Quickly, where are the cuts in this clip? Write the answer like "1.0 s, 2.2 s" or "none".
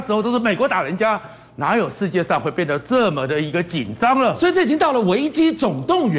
none